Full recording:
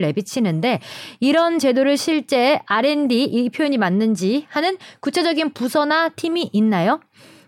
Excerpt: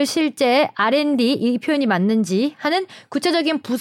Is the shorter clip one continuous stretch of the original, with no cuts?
yes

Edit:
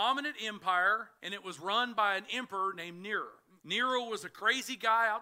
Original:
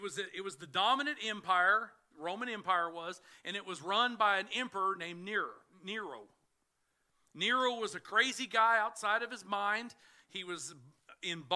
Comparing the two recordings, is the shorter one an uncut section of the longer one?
no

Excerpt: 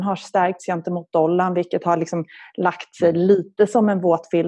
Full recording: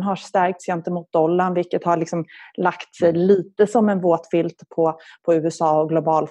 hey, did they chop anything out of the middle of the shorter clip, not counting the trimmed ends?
no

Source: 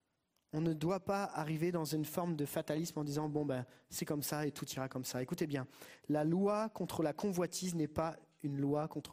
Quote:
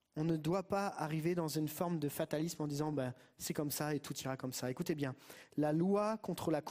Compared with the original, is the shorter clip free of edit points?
no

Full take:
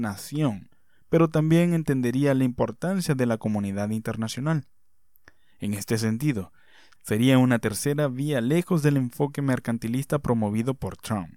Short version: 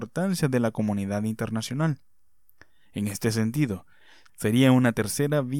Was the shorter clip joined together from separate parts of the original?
no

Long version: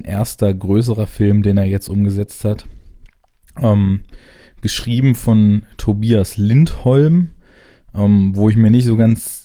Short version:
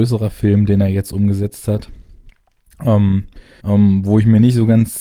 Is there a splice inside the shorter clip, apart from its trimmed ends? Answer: yes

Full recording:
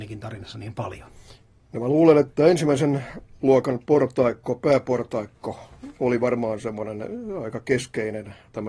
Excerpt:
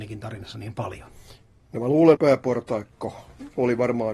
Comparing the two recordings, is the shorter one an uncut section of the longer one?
no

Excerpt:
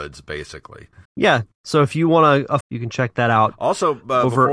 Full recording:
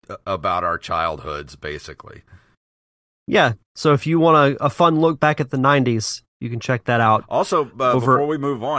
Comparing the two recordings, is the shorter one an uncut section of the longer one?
no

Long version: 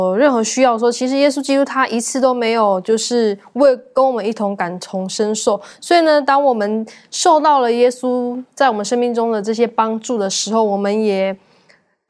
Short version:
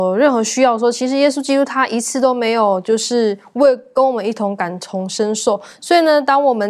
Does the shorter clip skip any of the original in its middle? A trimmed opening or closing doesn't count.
no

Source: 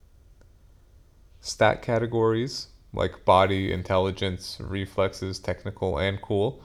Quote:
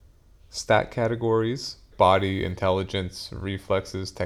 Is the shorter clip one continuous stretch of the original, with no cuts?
no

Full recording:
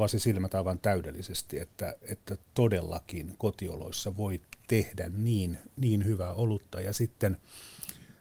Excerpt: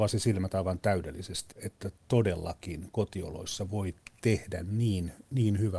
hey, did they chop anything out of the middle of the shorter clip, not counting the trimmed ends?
yes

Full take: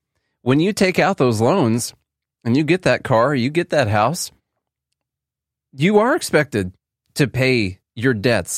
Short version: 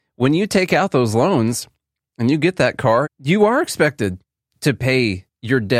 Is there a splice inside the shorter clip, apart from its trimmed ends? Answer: yes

